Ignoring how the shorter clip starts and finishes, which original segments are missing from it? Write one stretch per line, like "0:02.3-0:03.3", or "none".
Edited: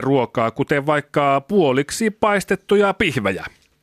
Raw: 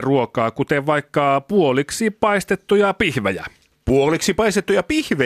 none

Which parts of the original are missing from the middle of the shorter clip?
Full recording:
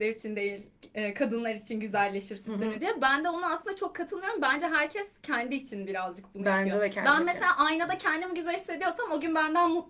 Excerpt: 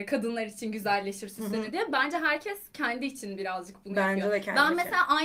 0:03.0-0:04.4

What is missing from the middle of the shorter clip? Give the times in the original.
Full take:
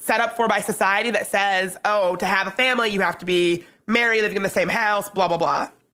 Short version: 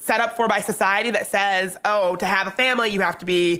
none

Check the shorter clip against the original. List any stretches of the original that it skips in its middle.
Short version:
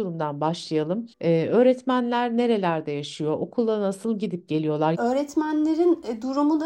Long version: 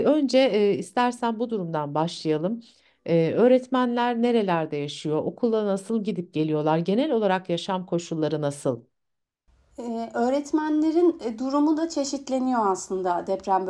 0:02.7-0:03.0
0:06.8-0:10.1

